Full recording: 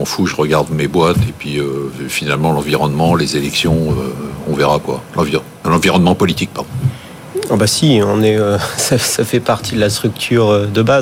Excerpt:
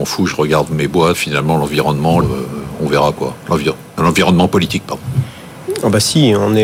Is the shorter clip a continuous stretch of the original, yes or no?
no